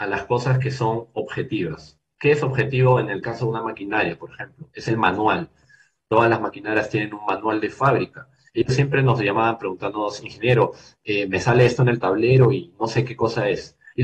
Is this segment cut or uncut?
uncut